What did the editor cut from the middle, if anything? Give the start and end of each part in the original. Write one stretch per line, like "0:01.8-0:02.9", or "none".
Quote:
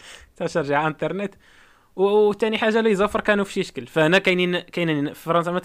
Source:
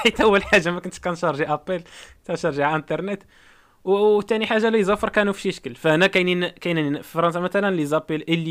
none